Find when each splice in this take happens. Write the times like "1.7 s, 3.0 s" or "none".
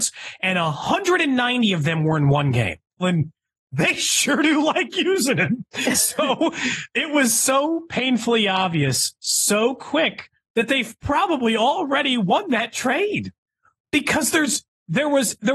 3.0 s